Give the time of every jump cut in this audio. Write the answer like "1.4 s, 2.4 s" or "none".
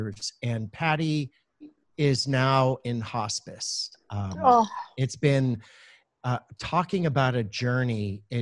none